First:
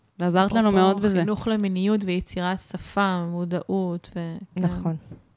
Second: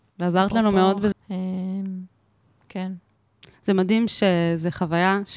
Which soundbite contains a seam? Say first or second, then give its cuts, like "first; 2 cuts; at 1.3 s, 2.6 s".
second; 1 cut; at 1.1 s